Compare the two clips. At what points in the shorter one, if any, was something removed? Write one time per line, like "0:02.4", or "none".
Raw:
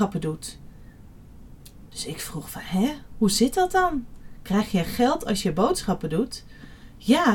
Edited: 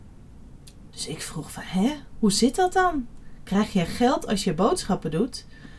none